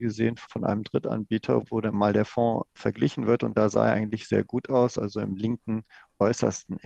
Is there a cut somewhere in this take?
no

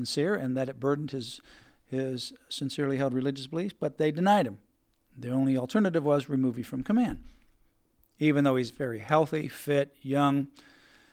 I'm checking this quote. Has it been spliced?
no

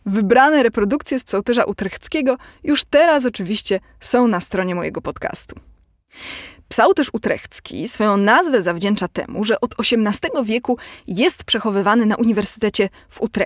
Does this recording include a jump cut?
no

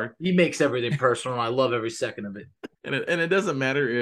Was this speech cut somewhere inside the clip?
yes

